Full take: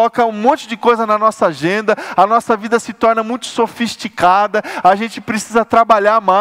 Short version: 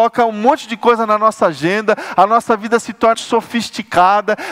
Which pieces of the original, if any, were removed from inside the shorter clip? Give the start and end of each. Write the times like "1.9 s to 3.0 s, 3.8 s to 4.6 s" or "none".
3.1 s to 3.4 s